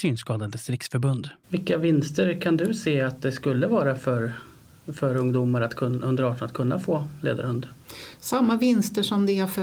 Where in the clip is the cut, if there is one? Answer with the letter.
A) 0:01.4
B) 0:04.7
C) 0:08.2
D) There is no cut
A